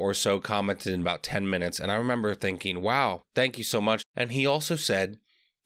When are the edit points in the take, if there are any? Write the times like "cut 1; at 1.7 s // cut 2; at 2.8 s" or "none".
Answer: cut 1; at 4.0 s